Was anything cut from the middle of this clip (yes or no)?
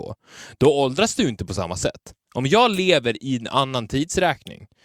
no